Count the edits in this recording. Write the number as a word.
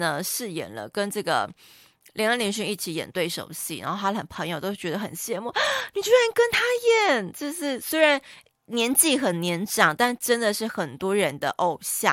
zero